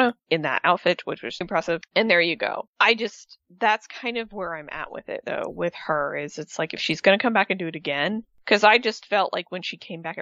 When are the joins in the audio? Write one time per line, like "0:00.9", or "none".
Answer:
0:01.4